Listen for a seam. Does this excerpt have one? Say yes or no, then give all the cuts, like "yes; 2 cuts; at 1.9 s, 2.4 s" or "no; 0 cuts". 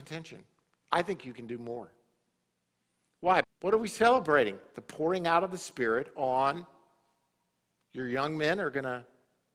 yes; 1 cut; at 3.4 s